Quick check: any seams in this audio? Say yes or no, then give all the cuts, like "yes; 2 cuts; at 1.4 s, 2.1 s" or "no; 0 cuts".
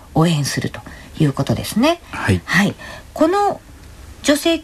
no; 0 cuts